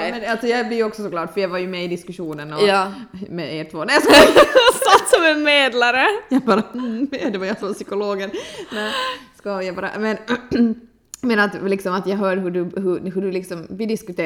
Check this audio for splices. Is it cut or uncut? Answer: uncut